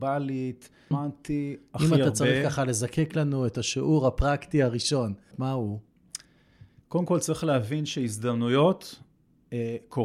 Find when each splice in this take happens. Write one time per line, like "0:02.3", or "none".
0:00.9
0:05.3
0:06.8